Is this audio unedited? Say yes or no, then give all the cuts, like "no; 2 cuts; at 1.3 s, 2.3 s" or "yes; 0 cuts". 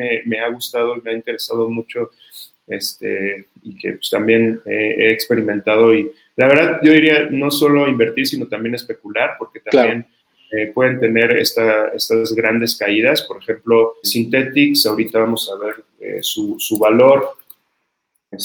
no; 1 cut; at 14.0 s